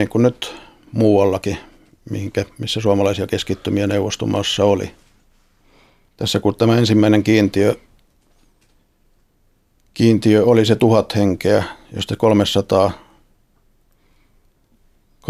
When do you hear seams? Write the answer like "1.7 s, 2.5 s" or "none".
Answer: none